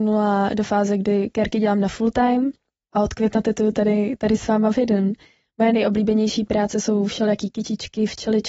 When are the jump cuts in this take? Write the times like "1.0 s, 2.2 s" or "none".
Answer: none